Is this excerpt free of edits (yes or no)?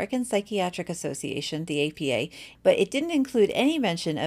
no